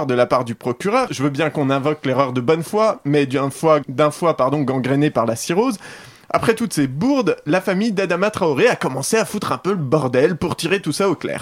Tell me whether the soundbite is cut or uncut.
cut